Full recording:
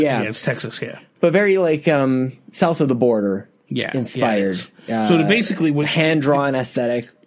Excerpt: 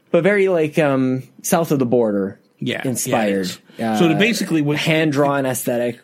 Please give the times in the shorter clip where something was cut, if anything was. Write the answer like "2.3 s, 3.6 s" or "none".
none